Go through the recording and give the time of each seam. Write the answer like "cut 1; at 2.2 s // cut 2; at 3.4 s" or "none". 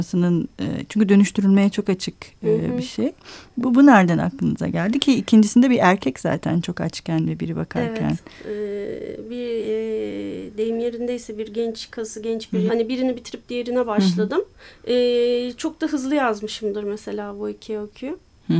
cut 1; at 12.7 s

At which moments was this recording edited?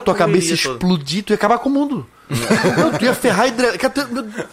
none

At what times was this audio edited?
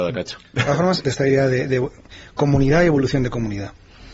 cut 1; at 1.0 s

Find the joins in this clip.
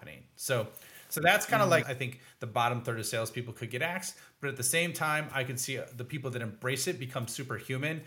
cut 1; at 1.8 s

